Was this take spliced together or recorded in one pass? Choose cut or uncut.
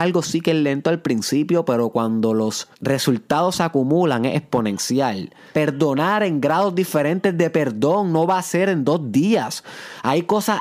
cut